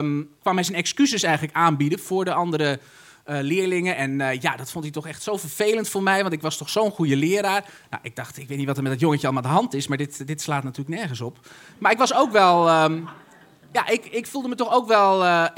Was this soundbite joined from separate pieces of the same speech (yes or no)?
no